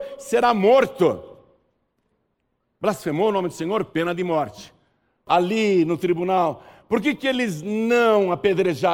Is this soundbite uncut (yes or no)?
no